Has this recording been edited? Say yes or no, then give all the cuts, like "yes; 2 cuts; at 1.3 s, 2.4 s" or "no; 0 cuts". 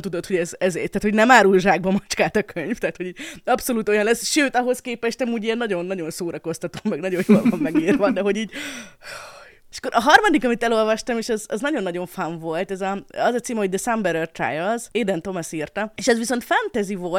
no; 0 cuts